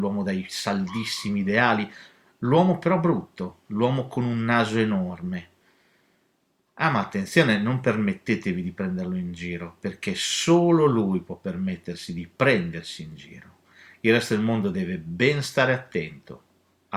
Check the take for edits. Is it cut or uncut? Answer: uncut